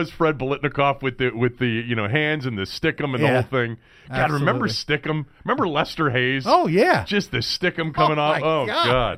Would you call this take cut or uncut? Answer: uncut